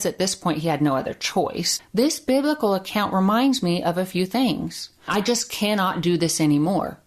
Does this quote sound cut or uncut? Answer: cut